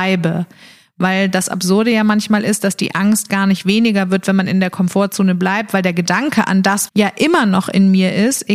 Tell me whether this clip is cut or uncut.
cut